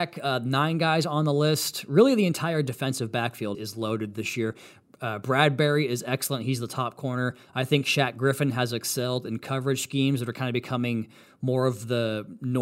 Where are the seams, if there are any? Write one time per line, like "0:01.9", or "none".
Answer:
0:03.5